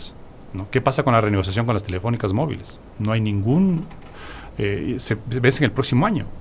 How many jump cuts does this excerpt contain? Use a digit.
1